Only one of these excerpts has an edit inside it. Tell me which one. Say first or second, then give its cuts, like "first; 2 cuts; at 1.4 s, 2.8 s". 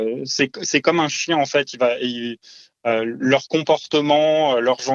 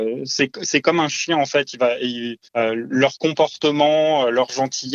second; 1 cut; at 2.4 s